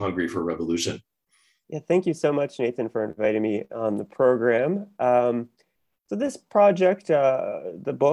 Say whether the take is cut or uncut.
uncut